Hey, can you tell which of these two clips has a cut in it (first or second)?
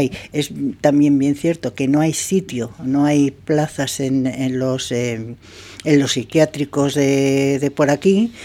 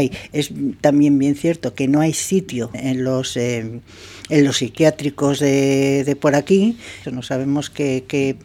second